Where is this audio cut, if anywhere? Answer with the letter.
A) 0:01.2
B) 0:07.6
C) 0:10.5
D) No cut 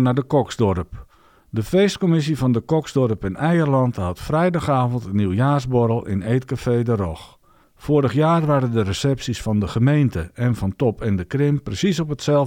B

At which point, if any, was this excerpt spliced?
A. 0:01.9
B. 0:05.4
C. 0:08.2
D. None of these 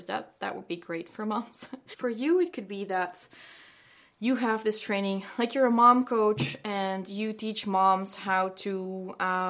A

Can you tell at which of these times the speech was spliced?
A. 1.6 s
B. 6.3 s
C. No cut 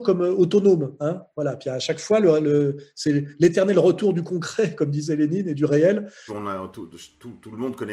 B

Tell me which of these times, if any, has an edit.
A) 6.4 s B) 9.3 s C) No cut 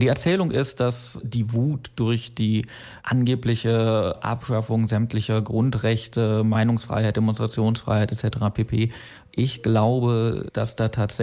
B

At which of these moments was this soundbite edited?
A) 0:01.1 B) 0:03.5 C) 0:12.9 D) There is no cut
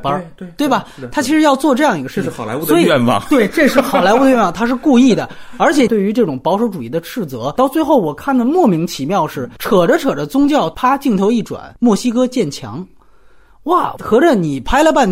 D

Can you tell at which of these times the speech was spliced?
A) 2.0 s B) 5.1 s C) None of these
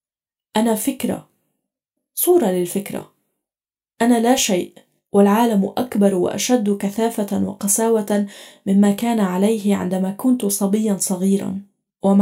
A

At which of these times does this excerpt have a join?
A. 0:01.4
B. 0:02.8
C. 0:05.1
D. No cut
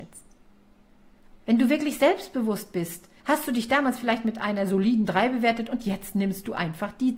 A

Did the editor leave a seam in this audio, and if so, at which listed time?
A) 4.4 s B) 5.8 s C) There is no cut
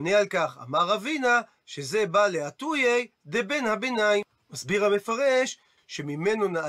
B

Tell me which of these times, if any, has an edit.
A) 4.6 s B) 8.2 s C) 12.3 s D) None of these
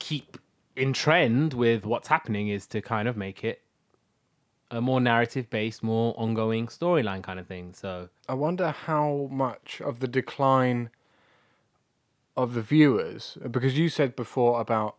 B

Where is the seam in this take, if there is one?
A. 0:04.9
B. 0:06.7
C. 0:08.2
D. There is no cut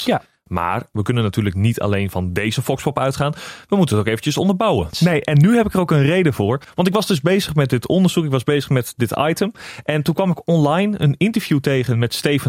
A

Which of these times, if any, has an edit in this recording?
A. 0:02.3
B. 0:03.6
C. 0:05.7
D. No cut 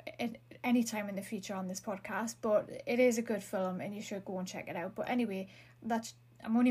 D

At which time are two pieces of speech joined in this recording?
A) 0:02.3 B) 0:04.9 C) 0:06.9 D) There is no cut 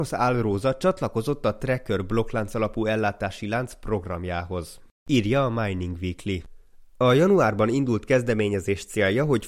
D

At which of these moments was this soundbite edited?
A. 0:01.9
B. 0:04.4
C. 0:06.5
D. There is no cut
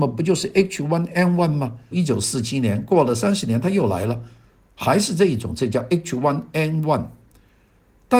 A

